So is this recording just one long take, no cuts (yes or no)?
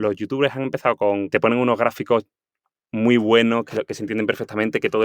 no